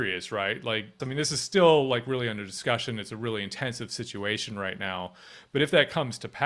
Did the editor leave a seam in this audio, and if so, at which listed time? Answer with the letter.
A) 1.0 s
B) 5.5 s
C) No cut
A